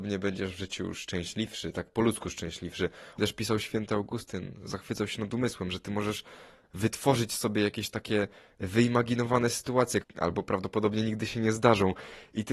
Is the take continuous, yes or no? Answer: no